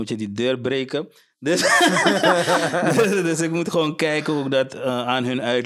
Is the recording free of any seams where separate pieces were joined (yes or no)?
yes